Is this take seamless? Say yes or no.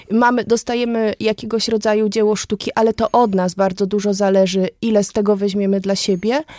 yes